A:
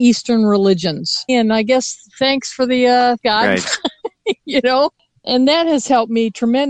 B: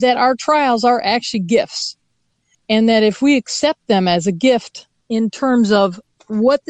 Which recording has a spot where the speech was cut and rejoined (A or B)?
A